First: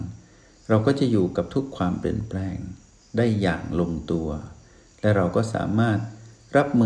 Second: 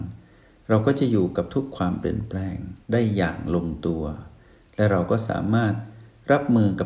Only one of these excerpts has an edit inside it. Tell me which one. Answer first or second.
second